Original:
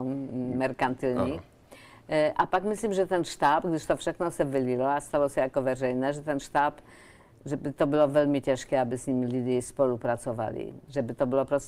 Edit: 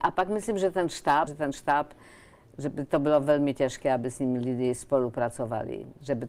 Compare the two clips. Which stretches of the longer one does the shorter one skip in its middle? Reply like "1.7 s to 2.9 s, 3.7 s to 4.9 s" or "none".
3.6 s to 6.1 s